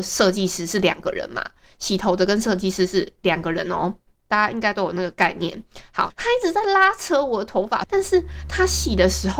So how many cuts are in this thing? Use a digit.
2